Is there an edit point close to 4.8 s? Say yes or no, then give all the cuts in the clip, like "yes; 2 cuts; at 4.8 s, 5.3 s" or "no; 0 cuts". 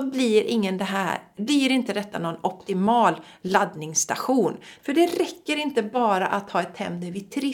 yes; 1 cut; at 4.8 s